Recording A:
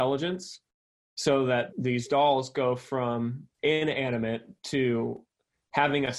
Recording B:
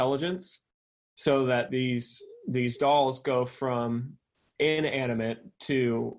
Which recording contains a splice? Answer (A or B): A